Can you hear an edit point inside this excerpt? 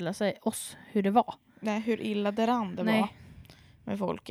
no; 0 cuts

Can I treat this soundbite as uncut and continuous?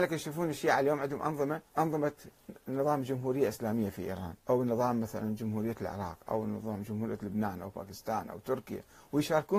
no; 2 cuts; at 1.7 s, 4.4 s

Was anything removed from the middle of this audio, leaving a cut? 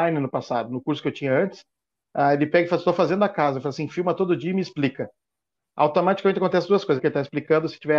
yes; 1 cut; at 7.0 s

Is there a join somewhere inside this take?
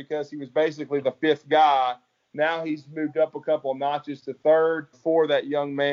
yes; 1 cut; at 4.9 s

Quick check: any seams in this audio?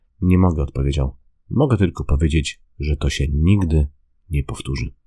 no; 0 cuts

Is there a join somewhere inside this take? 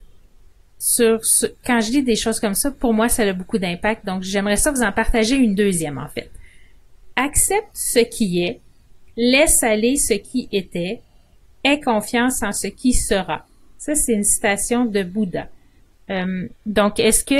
yes; 1 cut; at 16.0 s

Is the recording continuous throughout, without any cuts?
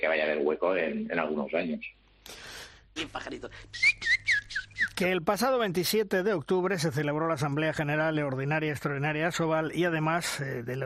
no; 1 cut; at 3.0 s

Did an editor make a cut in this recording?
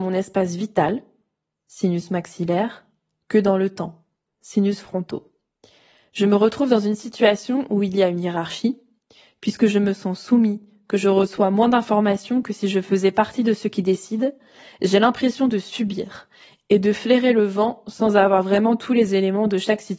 no; 0 cuts

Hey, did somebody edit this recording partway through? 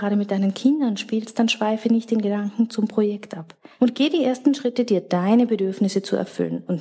yes; 1 cut; at 3.8 s

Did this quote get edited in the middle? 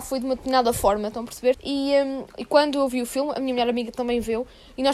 yes; 1 cut; at 1.5 s

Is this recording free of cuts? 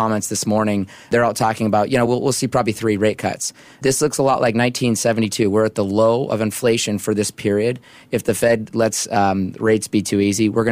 yes; 0 cuts

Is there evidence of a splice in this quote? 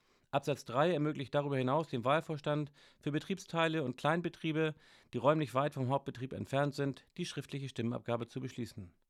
no; 0 cuts

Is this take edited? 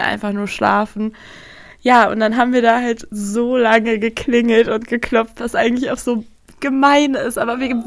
no; 0 cuts

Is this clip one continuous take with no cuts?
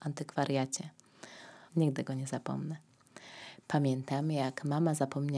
no; 1 cut; at 1.7 s

